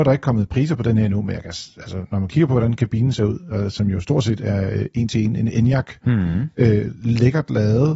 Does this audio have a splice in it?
no; 0 cuts

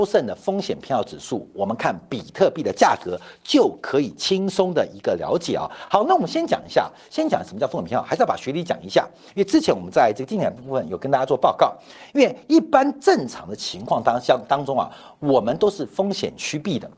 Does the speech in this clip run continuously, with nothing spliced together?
yes; 0 cuts

